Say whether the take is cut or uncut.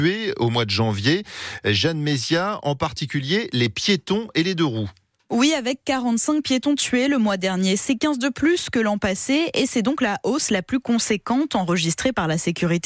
uncut